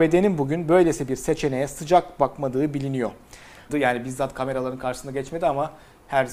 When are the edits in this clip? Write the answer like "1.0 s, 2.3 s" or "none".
3.7 s